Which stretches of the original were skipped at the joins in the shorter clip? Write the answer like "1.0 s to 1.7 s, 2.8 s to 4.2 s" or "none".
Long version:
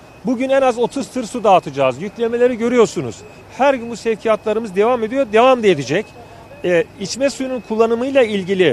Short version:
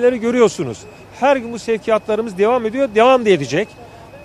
none